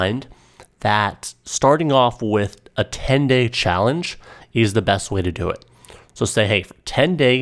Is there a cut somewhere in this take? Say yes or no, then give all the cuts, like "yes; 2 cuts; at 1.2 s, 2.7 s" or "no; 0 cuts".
no; 0 cuts